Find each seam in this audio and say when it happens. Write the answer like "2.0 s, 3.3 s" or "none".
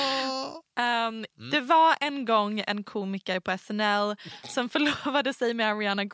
1.3 s